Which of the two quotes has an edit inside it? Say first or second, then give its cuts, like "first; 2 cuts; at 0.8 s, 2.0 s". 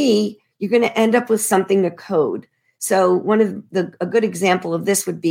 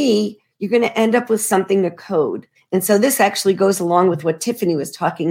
second; 1 cut; at 2.6 s